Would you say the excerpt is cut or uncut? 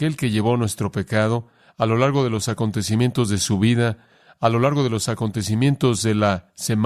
uncut